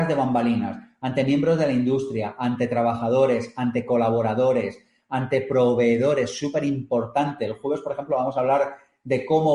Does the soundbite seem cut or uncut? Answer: uncut